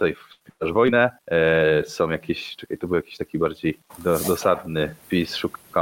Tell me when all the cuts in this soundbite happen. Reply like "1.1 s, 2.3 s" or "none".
none